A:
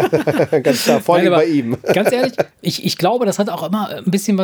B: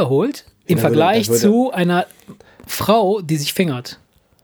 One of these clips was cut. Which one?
A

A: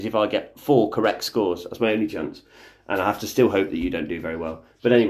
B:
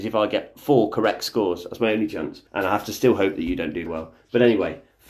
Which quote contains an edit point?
B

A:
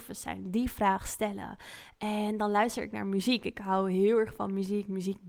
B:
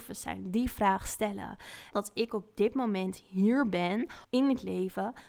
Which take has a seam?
B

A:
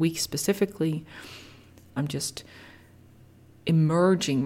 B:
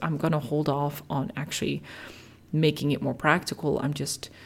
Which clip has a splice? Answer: A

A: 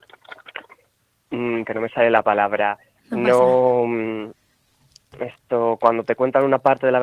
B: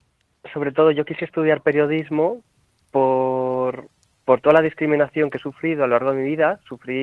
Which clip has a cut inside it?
A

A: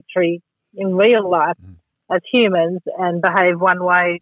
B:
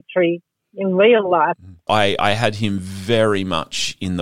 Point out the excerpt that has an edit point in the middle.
B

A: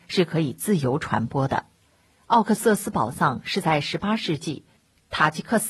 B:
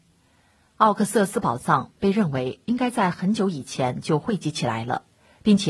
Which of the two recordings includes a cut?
A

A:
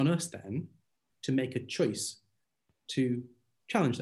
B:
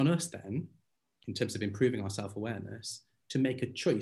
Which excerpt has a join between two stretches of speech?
A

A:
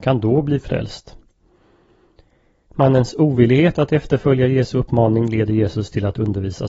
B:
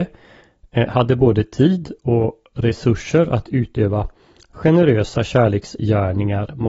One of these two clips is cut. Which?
A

